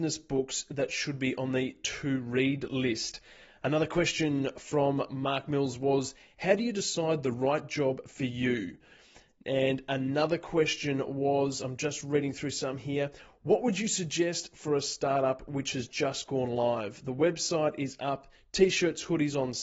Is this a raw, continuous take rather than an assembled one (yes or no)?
yes